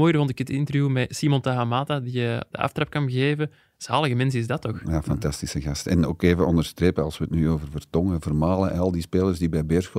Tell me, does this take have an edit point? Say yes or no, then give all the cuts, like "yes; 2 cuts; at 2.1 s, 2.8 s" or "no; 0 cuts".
no; 0 cuts